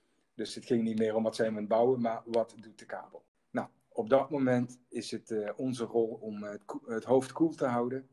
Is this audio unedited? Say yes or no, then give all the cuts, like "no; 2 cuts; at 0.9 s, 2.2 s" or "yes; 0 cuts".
yes; 0 cuts